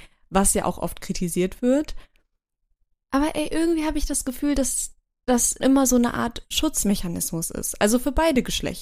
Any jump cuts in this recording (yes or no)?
yes